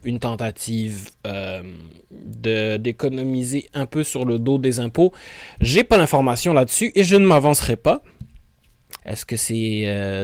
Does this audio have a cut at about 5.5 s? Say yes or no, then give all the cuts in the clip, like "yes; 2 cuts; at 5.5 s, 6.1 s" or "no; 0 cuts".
no; 1 cut; at 9.0 s